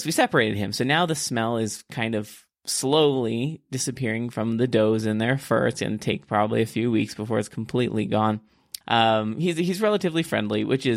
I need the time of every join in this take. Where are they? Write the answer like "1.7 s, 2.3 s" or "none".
8.8 s